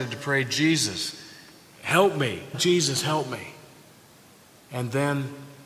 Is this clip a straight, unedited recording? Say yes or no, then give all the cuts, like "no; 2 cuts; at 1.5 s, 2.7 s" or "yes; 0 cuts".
no; 1 cut; at 2.5 s